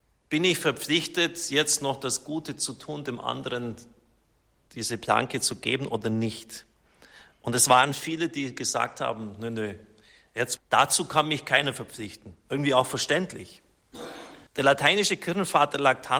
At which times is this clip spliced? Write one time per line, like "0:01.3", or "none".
0:10.6
0:14.5